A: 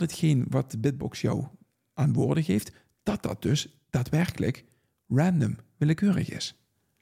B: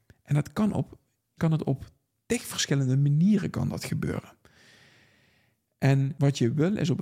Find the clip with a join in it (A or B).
B